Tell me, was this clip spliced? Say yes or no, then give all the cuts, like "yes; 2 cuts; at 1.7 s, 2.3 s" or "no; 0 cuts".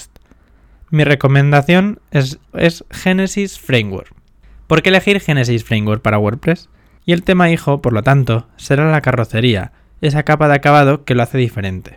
yes; 2 cuts; at 2.5 s, 7.0 s